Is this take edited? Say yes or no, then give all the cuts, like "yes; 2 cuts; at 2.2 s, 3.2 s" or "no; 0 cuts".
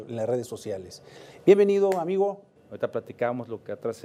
yes; 2 cuts; at 1.4 s, 2.6 s